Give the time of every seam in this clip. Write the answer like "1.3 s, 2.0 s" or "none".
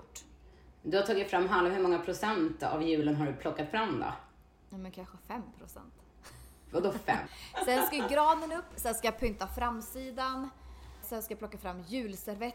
7.3 s, 11.0 s